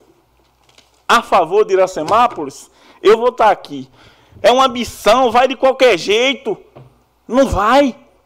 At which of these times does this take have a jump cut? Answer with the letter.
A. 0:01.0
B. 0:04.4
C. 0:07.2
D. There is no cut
B